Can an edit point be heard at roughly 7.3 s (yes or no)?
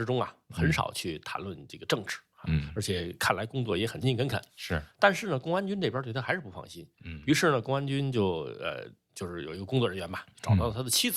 no